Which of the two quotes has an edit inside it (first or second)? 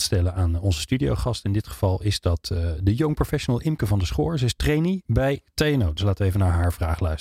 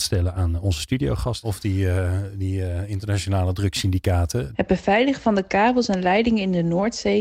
second